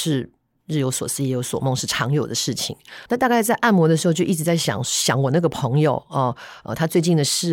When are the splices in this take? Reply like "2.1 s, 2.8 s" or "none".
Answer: 3.1 s